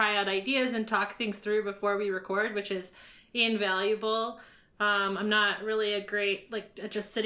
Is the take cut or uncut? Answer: uncut